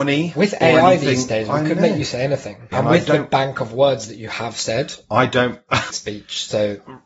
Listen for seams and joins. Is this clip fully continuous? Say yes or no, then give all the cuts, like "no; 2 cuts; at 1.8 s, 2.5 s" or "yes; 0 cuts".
no; 2 cuts; at 2.7 s, 5.9 s